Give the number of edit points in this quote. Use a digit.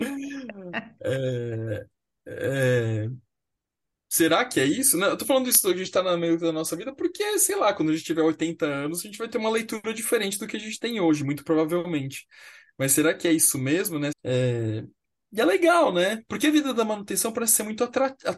2